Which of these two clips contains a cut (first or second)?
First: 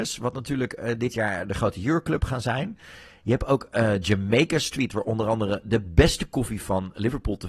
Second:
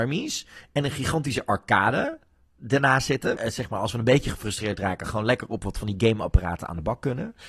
second